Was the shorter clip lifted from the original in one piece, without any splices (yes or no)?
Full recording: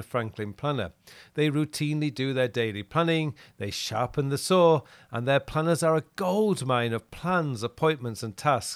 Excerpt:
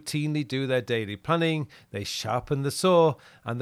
yes